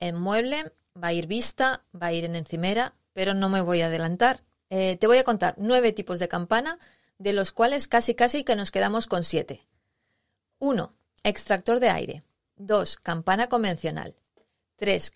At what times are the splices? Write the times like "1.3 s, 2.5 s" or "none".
4.6 s